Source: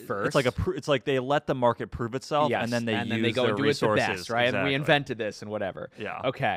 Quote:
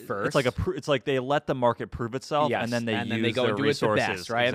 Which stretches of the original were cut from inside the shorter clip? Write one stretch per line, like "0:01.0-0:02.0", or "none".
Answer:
none